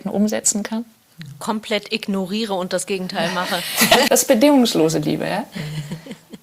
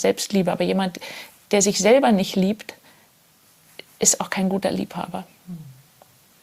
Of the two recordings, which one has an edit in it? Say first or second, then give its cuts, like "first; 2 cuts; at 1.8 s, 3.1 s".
first; 1 cut; at 4.1 s